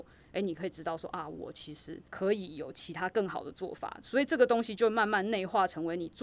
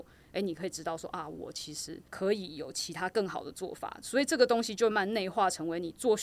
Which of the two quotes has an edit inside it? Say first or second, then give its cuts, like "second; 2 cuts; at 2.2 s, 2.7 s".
second; 1 cut; at 4.9 s